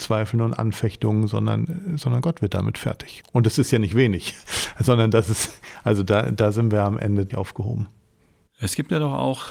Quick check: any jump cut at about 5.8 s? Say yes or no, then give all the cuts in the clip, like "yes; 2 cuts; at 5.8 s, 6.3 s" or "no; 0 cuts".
no; 2 cuts; at 3.2 s, 7.3 s